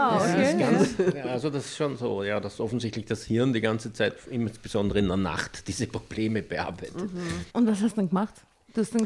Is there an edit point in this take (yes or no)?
yes